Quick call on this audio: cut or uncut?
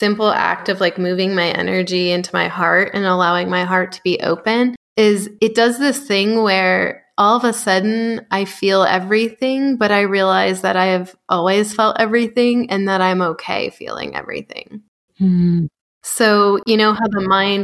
uncut